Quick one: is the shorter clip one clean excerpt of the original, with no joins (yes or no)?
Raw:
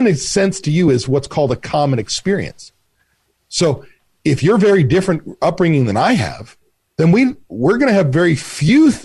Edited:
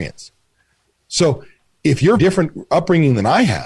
no